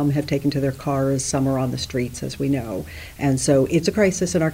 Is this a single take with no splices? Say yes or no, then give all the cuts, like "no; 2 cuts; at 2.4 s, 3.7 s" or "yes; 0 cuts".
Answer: yes; 0 cuts